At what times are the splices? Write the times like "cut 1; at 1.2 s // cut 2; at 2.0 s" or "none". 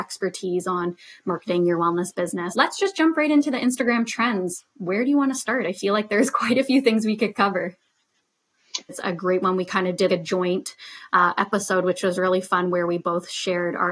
cut 1; at 2.5 s // cut 2; at 8.9 s // cut 3; at 10.1 s